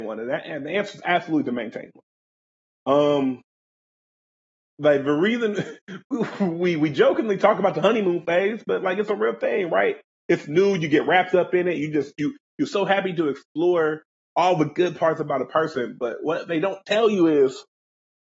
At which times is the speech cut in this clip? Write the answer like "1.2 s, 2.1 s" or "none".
none